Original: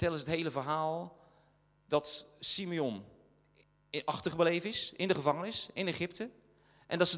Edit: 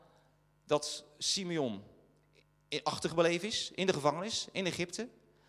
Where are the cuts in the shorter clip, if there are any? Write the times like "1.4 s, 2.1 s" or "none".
none

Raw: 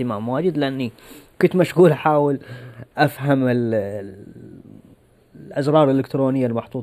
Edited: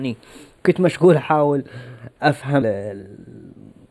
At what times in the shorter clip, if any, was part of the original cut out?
2.6 s

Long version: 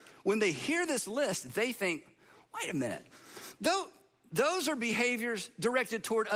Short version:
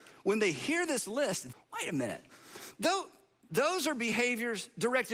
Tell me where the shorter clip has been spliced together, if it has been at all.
1.5 s

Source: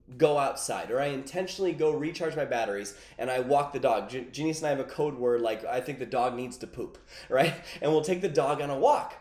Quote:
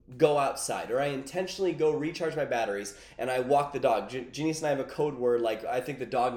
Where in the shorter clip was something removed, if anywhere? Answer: none

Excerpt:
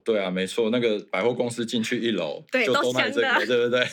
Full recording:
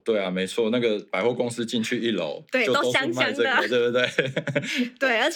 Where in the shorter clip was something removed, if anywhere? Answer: 2.9 s

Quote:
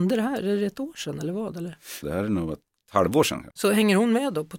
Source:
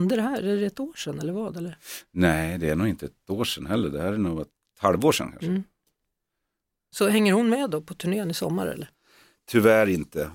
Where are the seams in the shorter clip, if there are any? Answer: 2.0 s, 3.5 s

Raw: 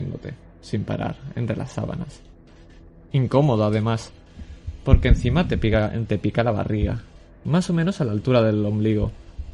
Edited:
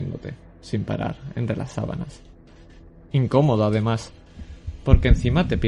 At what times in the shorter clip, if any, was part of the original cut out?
none

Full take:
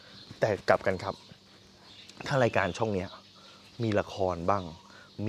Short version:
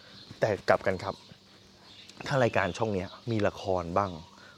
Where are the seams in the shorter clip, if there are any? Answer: 3.2 s

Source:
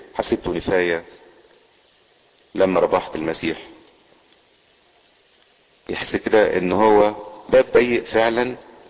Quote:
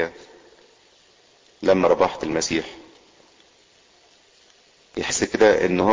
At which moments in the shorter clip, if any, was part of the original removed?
none

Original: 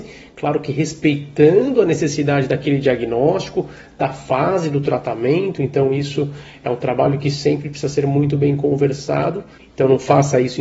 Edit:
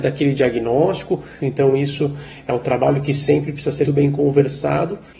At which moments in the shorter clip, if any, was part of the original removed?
1.4 s, 3.8 s

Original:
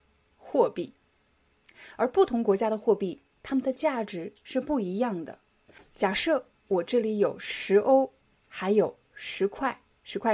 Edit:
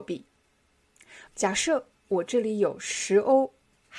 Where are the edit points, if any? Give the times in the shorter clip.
1.3 s

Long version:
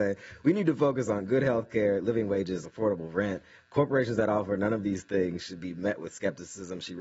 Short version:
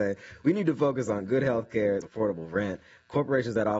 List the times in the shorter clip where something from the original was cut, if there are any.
2.0 s

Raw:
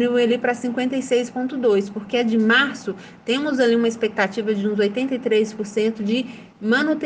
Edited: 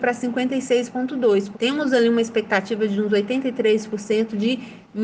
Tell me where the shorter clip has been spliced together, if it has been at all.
1.5 s

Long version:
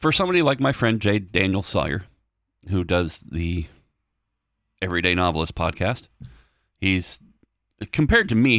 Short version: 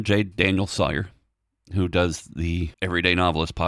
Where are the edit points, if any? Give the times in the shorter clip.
2.7 s

